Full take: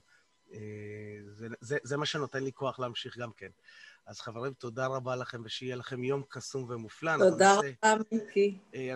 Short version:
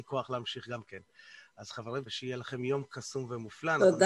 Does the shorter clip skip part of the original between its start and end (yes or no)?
yes